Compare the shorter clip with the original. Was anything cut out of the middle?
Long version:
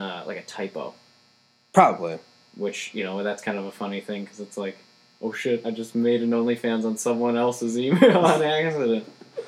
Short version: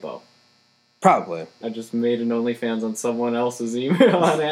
yes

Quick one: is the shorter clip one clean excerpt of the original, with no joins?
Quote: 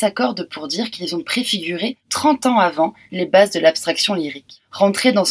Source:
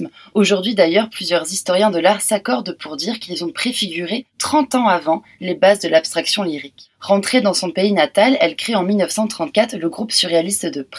yes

